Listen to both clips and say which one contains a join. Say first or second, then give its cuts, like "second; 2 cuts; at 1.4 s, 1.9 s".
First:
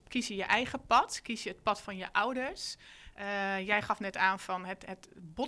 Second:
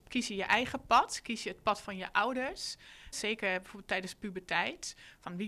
second; 1 cut; at 3.1 s